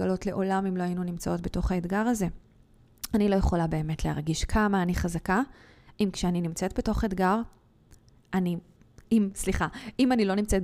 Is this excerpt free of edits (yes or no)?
yes